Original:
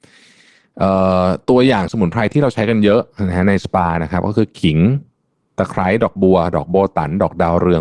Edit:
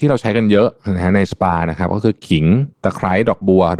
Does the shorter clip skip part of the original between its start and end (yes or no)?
yes